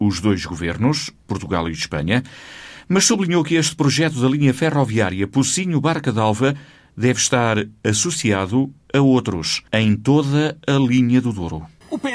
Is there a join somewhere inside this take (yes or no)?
yes